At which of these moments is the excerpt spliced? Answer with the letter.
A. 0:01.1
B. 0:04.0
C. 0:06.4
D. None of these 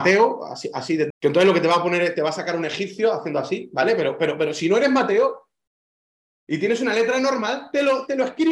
A